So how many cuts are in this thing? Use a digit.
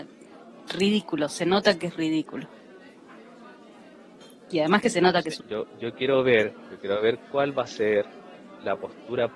1